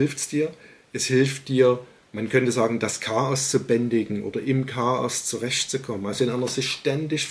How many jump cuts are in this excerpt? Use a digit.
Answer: 0